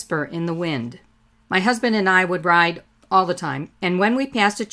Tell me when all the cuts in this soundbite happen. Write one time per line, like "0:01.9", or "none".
0:01.3
0:03.7